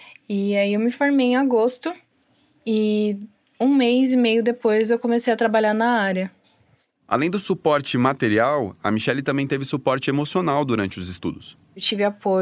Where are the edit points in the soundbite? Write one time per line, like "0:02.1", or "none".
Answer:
none

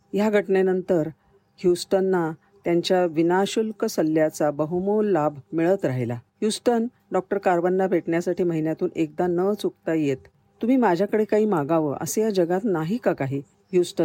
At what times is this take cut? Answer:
0:05.5

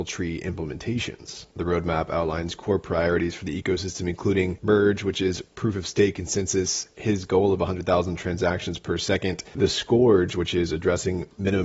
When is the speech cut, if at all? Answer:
0:01.5
0:06.9

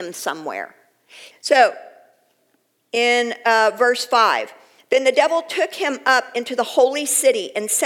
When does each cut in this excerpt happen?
0:01.3

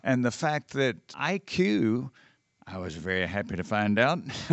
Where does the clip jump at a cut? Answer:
0:01.1

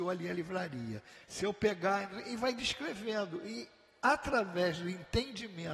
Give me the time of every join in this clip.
0:01.2

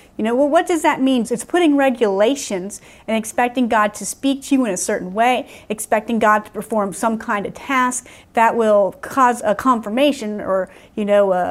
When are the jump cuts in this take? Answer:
0:01.2
0:08.2

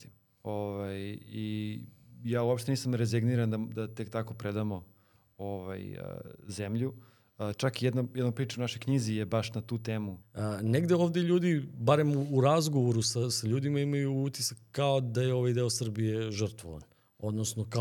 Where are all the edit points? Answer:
0:10.2

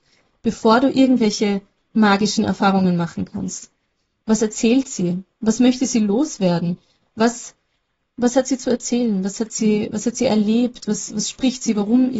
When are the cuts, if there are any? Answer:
0:04.2

